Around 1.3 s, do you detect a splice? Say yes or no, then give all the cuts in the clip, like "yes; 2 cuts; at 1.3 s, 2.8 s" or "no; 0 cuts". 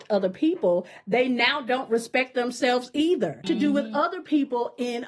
no; 1 cut; at 3.4 s